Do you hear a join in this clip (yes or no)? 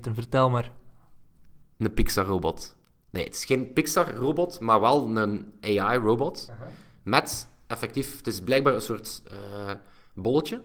no